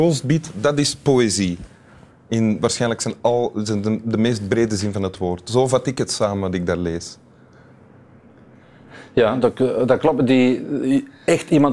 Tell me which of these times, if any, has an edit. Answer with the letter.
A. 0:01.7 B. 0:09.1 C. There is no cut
C